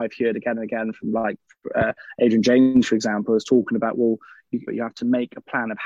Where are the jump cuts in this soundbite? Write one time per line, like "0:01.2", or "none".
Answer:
0:04.7